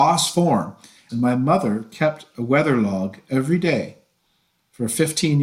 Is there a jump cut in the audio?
yes; 1 cut; at 1.1 s

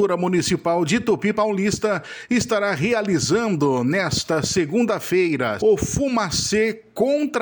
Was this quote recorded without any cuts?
no; 1 cut; at 5.6 s

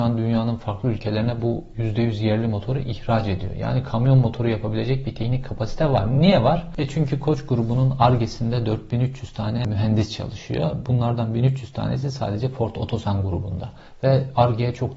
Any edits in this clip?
no; 0 cuts

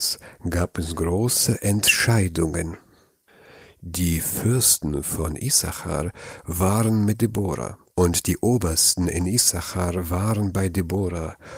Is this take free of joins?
no; 1 cut; at 7.9 s

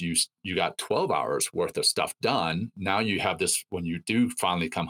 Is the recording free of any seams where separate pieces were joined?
yes; 0 cuts

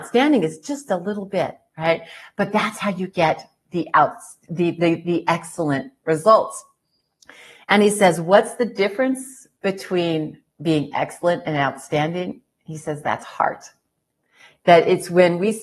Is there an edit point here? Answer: no; 0 cuts

